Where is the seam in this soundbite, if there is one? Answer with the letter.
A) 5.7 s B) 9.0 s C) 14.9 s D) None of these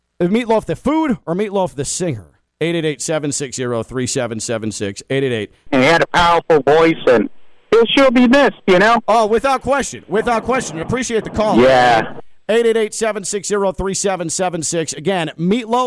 A